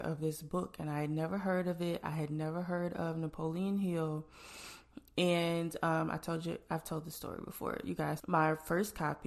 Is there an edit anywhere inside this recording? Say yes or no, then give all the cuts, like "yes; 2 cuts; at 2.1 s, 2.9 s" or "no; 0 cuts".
yes; 1 cut; at 8.2 s